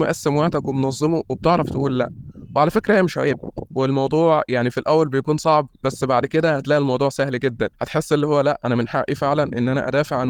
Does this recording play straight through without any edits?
no; 1 cut; at 7.7 s

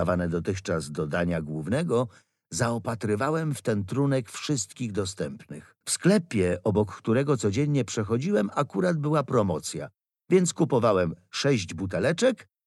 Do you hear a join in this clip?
yes; 1 cut; at 5.8 s

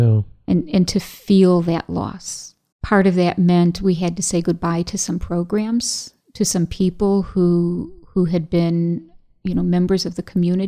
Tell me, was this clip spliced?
yes; 1 cut; at 2.7 s

